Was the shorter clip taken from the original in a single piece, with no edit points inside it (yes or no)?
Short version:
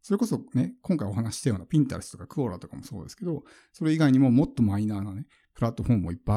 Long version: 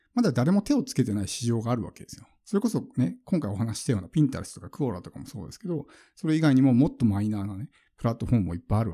yes